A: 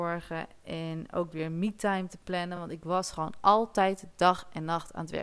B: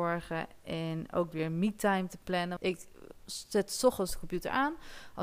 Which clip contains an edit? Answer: B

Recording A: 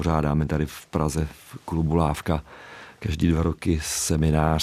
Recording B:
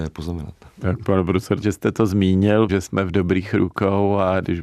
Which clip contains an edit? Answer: B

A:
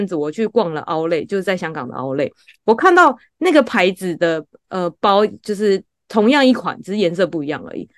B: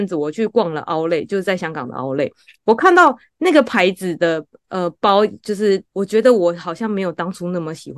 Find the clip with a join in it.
B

